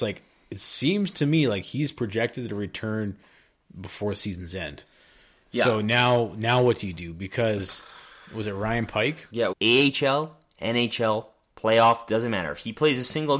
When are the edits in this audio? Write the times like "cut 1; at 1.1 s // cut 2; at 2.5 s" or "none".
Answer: cut 1; at 9.5 s